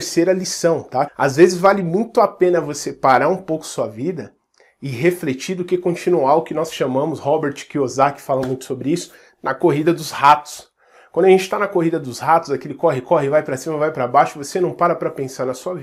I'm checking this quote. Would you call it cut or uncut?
cut